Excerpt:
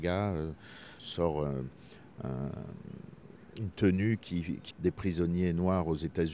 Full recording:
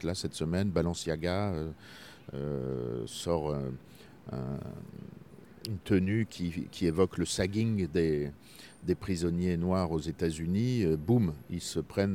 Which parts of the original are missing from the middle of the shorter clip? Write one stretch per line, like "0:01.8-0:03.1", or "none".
0:02.2-0:03.1
0:06.8-0:08.7